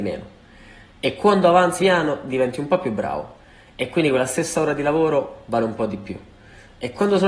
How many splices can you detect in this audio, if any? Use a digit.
1